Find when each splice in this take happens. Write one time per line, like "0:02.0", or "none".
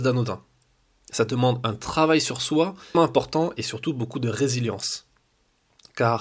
0:02.9